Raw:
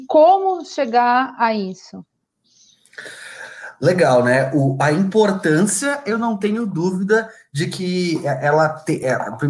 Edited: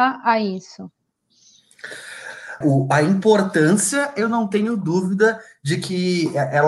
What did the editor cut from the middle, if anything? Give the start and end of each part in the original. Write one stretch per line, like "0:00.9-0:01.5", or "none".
0:03.7-0:04.5